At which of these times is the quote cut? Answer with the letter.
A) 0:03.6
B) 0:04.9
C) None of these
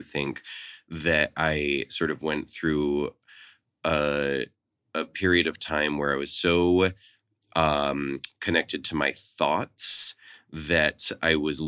C